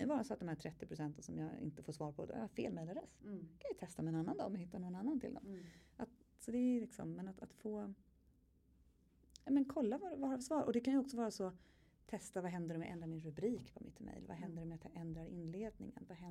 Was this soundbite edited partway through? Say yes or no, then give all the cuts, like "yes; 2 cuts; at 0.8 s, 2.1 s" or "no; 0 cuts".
no; 0 cuts